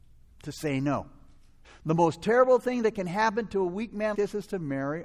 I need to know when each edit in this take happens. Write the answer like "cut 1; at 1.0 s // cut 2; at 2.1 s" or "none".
cut 1; at 1.6 s // cut 2; at 4.1 s